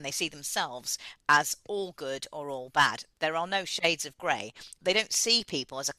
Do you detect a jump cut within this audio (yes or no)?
no